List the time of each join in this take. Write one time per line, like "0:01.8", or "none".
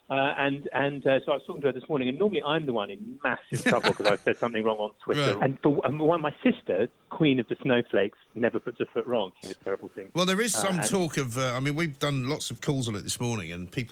0:05.4
0:09.4